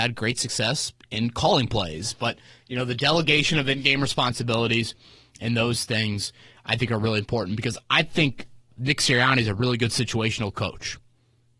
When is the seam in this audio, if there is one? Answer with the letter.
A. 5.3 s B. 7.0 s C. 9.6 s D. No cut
D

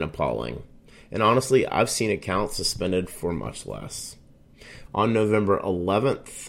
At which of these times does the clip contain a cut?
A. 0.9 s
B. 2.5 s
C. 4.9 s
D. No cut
C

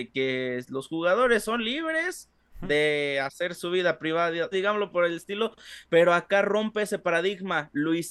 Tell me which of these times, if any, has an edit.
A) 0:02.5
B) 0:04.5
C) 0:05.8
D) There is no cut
B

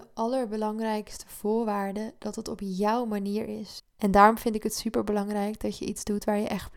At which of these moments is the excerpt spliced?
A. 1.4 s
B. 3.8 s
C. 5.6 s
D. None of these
B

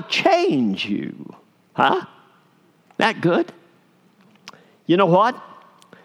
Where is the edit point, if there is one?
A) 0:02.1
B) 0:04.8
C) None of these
C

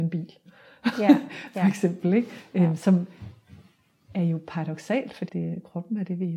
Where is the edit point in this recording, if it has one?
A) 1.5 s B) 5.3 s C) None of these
B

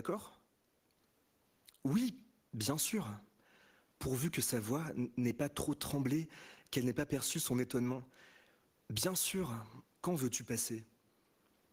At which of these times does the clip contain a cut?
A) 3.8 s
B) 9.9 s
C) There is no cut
B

